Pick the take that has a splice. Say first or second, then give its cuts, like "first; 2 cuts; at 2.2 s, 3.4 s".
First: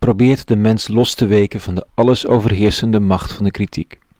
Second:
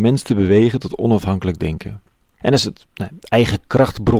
second; 1 cut; at 2.4 s